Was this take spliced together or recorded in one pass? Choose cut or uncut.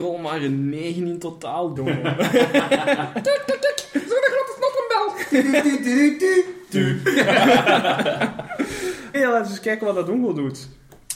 cut